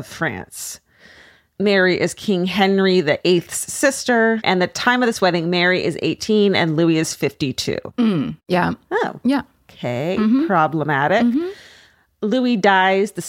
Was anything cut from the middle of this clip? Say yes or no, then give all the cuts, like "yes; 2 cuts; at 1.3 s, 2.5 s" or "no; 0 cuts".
no; 0 cuts